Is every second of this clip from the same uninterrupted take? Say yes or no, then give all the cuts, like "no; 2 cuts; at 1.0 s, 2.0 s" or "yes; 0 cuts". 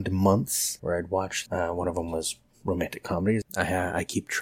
no; 2 cuts; at 1.5 s, 3.4 s